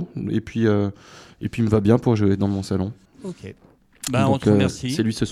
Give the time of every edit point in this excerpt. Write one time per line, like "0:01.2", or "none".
0:03.1